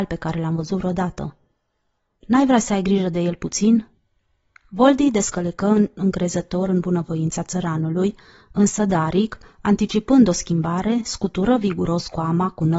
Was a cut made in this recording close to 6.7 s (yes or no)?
no